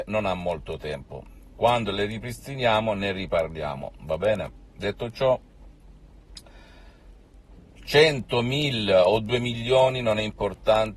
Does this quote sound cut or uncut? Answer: uncut